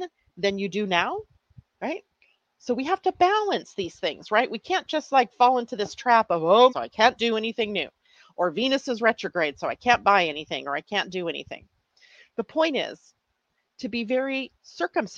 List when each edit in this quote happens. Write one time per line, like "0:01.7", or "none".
0:06.7